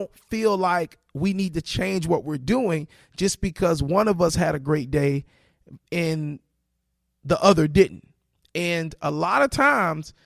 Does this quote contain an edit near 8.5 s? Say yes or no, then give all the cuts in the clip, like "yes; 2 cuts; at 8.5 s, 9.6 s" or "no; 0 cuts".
no; 0 cuts